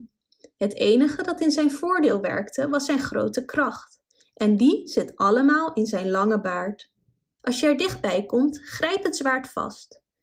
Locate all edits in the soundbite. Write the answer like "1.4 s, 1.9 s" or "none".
7.4 s